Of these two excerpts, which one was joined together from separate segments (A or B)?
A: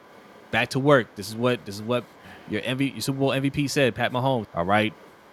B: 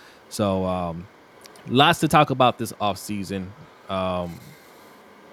A